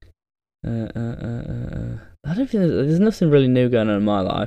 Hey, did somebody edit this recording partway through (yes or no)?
no